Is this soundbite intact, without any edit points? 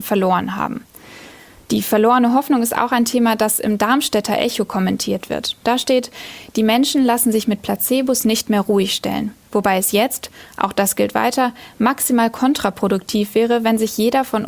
yes; 0 cuts

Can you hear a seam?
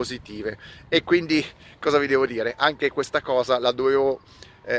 no; 0 cuts

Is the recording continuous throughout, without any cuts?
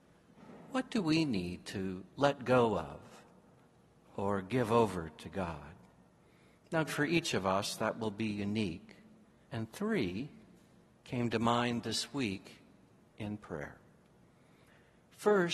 no; 2 cuts; at 6.9 s, 9.4 s

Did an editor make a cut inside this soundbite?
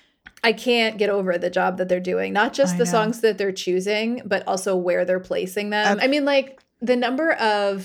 yes; 1 cut; at 6.0 s

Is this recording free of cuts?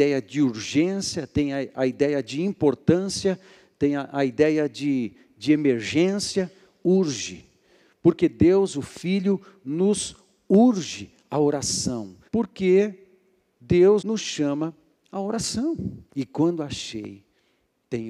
no; 3 cuts; at 12.3 s, 14.0 s, 16.1 s

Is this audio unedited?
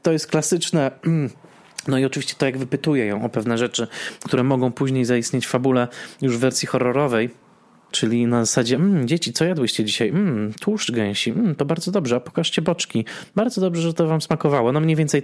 no; 1 cut; at 7.9 s

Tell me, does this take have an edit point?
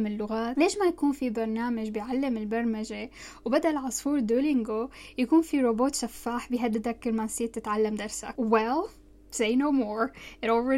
no; 0 cuts

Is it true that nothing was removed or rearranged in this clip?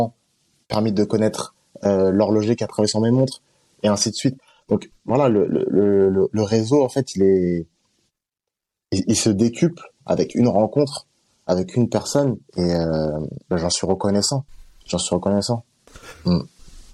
no; 1 cut; at 12.5 s

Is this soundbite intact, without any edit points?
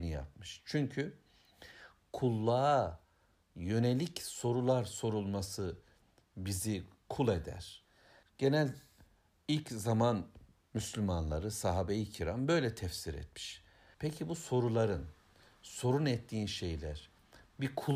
no; 2 cuts; at 8.2 s, 13.9 s

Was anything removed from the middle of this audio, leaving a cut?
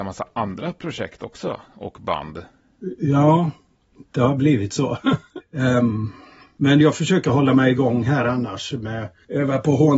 yes; 1 cut; at 5.4 s

